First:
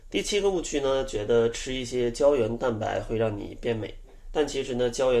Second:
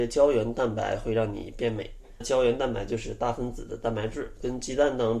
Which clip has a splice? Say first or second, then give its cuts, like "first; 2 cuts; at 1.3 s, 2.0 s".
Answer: second; 1 cut; at 2.2 s